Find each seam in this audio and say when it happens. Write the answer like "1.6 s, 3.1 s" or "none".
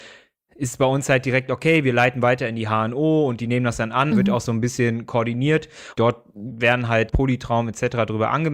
4.1 s, 5.9 s, 7.1 s

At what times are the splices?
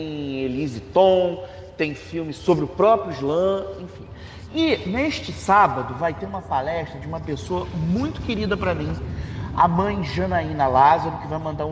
none

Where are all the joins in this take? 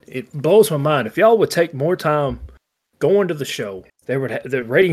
3.9 s

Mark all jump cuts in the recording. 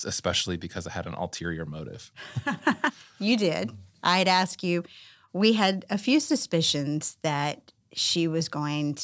none

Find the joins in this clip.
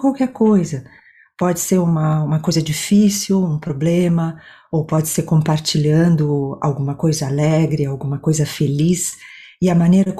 none

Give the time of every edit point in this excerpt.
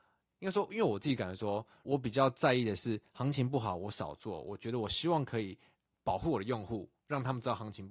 1.8 s

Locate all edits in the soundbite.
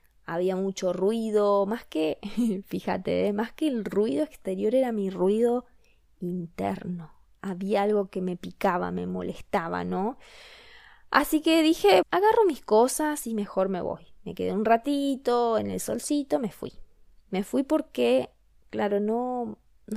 12.0 s

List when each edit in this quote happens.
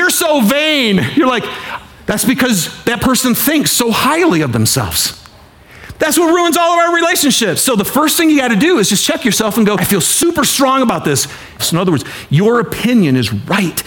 5.9 s, 9.8 s, 11.6 s

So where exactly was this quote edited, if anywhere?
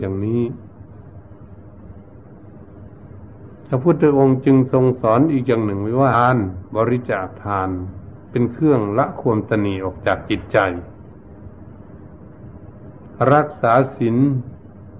6.1 s

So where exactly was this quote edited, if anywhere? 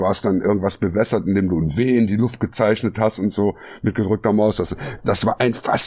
none

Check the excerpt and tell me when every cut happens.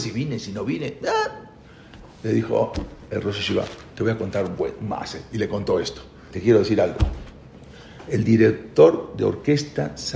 6.3 s

